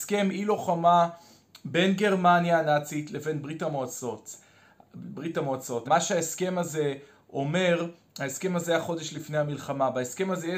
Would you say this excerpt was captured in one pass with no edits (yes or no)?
no